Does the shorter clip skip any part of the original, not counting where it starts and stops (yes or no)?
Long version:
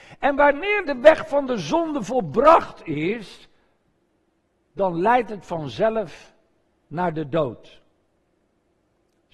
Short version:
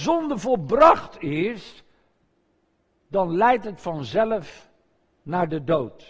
no